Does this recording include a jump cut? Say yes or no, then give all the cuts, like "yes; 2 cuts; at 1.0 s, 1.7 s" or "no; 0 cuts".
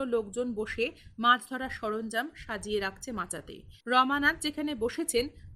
yes; 1 cut; at 3.8 s